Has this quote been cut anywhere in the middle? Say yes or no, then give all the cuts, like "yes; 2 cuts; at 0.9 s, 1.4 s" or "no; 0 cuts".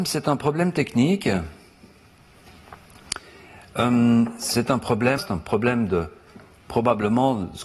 yes; 1 cut; at 5.2 s